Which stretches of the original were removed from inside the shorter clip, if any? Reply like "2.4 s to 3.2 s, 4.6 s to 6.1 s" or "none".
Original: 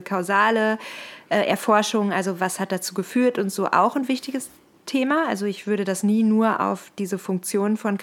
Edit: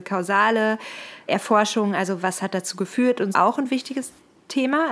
1.3 s to 1.5 s, 3.5 s to 3.7 s